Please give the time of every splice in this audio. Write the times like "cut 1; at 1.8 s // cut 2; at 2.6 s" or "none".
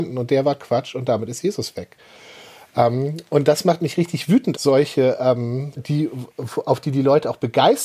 cut 1; at 4.5 s // cut 2; at 5.8 s